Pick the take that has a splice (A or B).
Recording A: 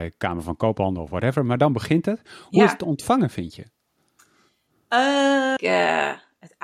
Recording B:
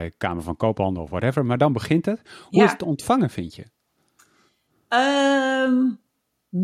A